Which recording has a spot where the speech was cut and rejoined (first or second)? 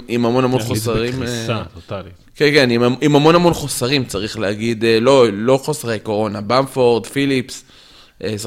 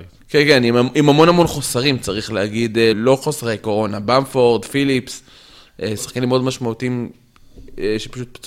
second